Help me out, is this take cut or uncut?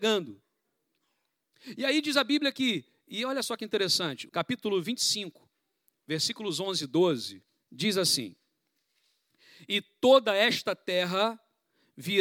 cut